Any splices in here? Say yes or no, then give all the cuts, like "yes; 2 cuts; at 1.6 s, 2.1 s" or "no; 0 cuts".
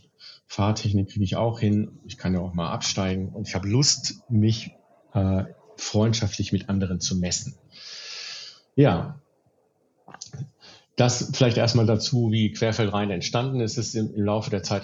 no; 0 cuts